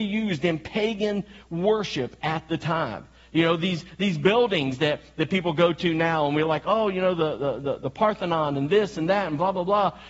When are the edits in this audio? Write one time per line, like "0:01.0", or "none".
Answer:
none